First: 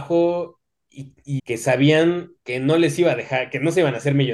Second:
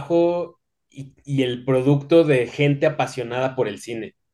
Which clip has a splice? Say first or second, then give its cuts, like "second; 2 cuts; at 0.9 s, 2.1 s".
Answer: first; 1 cut; at 1.4 s